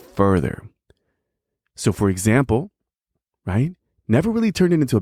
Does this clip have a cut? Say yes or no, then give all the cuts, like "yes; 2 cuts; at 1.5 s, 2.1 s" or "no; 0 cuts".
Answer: yes; 1 cut; at 3.3 s